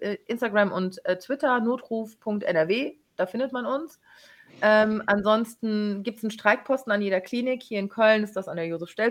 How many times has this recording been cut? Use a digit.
0